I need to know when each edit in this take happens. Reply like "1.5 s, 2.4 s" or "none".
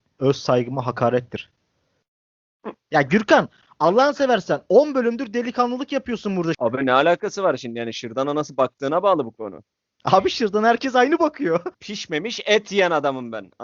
6.5 s, 11.7 s